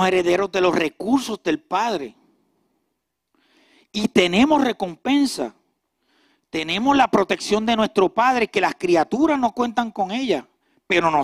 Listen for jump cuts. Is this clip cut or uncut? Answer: uncut